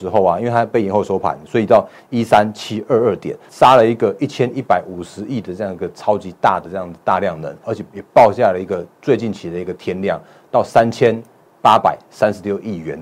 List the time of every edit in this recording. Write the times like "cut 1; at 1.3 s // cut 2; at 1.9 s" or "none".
cut 1; at 3.5 s // cut 2; at 7.6 s